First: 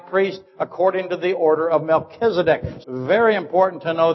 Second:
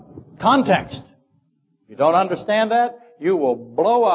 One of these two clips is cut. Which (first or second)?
first